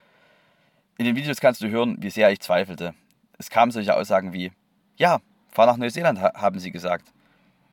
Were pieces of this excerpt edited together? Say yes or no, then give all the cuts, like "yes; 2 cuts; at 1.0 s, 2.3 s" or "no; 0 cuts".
no; 0 cuts